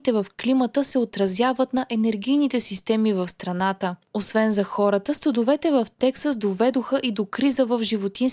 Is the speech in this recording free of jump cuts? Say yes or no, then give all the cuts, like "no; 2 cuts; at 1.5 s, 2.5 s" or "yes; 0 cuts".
yes; 0 cuts